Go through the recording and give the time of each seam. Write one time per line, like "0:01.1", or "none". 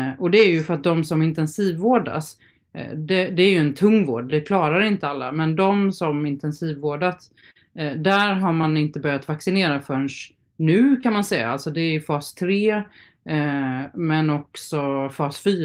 none